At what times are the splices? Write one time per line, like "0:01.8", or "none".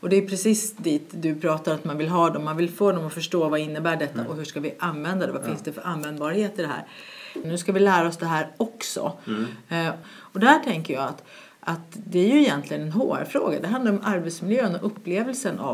0:07.4
0:10.0